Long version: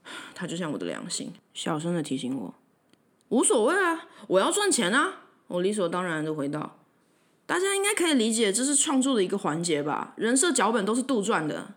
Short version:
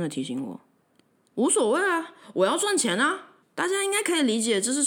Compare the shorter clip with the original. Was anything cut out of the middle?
yes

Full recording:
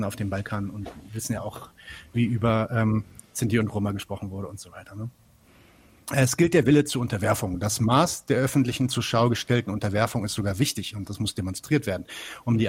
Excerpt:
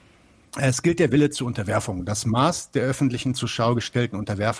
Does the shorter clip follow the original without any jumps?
yes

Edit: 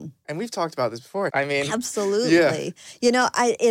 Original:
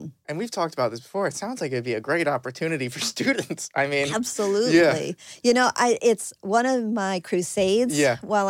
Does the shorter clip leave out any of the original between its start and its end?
yes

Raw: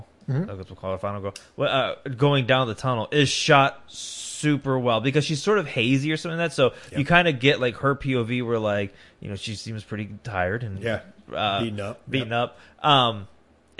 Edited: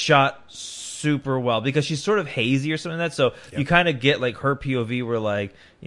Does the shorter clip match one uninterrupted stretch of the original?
yes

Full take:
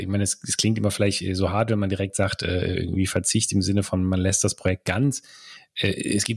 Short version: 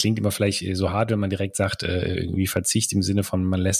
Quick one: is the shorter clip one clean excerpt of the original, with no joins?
yes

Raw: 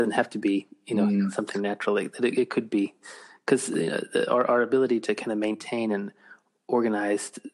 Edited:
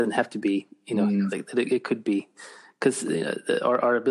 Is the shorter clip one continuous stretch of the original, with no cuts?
no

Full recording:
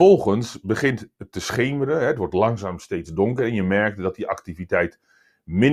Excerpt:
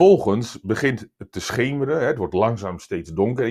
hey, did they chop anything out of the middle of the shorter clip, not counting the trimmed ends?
no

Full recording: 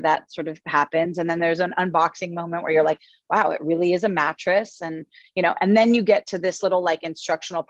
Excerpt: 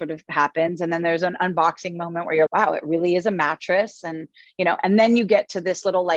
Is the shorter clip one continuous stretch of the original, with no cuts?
no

